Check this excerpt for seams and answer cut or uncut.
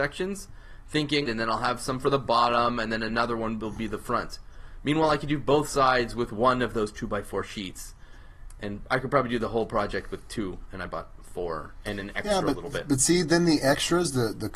cut